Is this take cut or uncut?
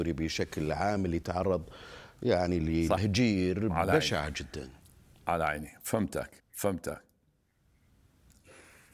cut